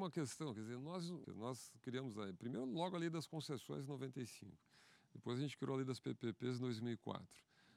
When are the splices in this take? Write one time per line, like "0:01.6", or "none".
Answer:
0:01.2